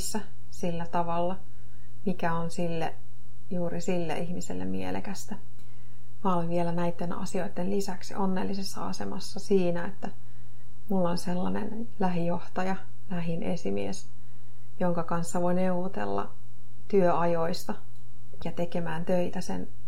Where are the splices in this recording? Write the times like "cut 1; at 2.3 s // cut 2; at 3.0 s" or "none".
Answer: cut 1; at 18.4 s